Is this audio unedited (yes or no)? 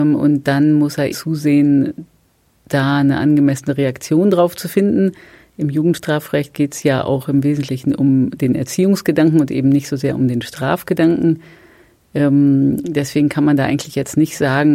no